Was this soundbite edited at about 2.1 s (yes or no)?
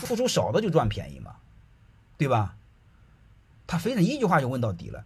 no